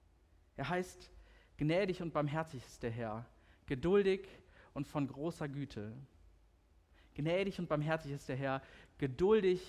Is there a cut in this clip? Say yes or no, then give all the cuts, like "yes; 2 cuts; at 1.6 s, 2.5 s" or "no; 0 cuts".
no; 0 cuts